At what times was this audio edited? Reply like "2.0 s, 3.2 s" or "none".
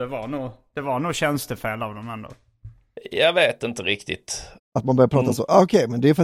4.6 s